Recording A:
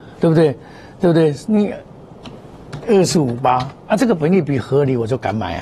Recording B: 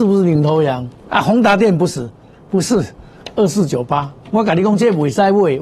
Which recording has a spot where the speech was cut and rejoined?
B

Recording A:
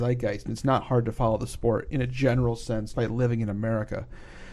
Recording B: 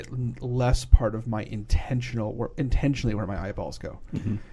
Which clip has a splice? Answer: A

